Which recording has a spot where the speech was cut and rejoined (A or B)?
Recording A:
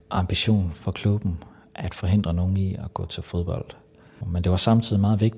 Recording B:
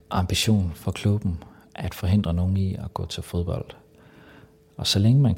A